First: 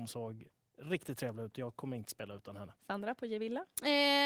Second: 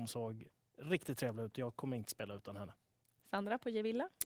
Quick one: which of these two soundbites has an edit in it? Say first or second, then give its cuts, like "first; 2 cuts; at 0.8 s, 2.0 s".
first; 1 cut; at 2.8 s